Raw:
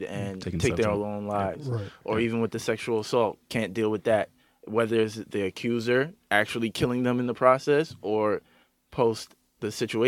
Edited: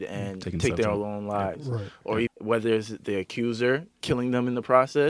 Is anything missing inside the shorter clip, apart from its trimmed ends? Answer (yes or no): yes